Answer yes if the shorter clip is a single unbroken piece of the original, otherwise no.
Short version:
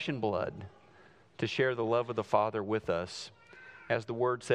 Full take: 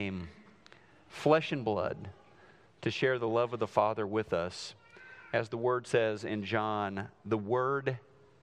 yes